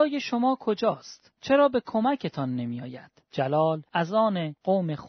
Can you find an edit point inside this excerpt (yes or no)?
yes